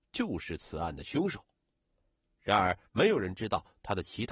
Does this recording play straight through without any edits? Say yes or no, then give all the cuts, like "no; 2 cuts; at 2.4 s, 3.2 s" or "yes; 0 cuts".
no; 1 cut; at 2.9 s